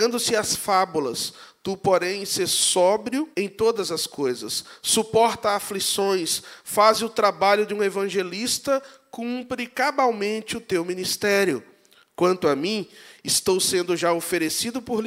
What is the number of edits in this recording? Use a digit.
1